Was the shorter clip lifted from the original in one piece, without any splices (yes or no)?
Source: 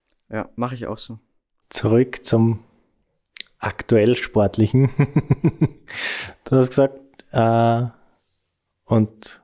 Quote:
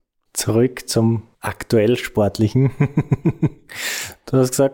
no